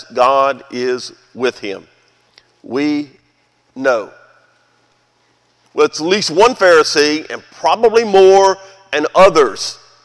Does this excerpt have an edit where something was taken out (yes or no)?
yes